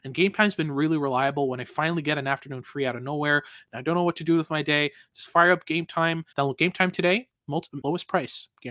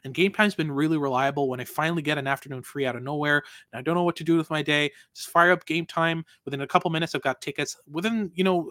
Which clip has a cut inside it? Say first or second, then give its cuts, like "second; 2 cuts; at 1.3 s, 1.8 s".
first; 2 cuts; at 6.3 s, 7.8 s